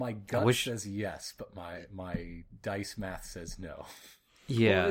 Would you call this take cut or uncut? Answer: uncut